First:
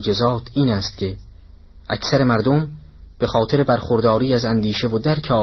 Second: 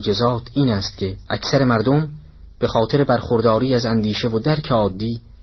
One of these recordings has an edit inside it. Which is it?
second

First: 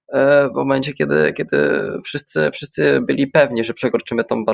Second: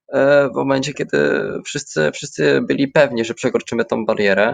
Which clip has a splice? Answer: second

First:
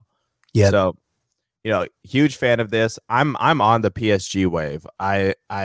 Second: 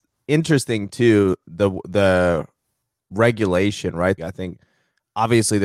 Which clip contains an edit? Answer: second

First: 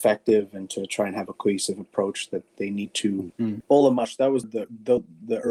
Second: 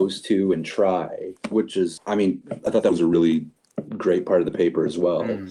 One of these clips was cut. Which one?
first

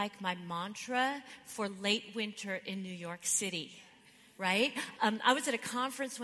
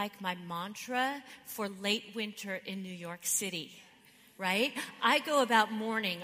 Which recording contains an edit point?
first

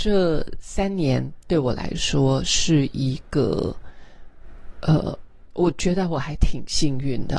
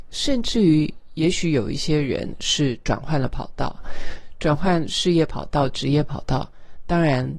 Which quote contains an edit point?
first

